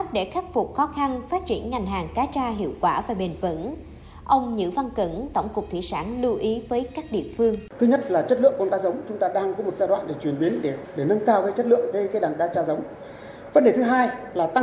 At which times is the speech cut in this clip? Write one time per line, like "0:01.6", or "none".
0:05.3